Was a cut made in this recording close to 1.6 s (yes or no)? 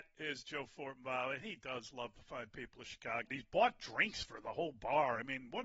no